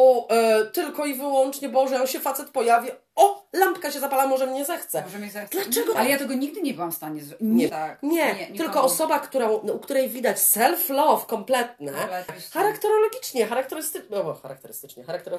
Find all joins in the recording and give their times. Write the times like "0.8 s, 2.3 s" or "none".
6.0 s, 7.7 s, 12.3 s